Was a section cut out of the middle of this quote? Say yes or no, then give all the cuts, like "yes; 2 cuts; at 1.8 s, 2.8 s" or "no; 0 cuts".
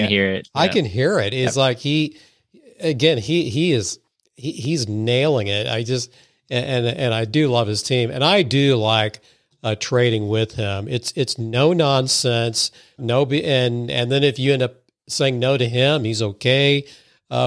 yes; 1 cut; at 13.0 s